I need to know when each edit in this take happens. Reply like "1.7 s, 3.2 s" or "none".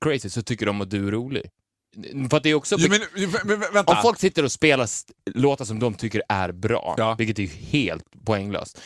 1.9 s